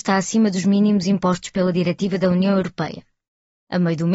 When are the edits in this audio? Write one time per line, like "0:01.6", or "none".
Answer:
none